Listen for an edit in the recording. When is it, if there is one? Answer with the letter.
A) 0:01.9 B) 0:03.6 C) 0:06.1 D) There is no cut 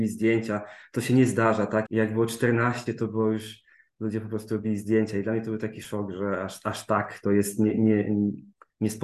A